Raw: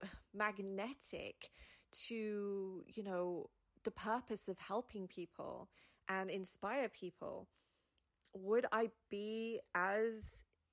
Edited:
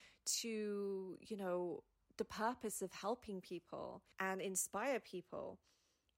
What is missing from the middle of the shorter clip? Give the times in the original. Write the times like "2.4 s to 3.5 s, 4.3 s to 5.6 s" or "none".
5.8 s to 6.0 s